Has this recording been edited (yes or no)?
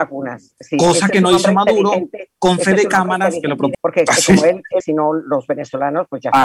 yes